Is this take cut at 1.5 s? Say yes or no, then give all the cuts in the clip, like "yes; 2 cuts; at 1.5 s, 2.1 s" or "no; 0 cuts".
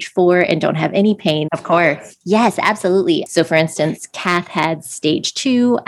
yes; 2 cuts; at 1.5 s, 3.3 s